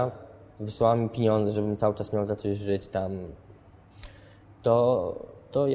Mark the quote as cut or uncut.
uncut